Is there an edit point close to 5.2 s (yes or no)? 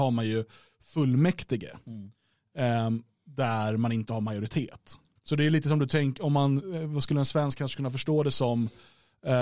yes